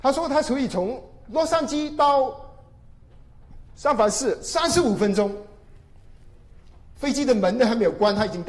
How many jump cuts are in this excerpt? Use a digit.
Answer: 1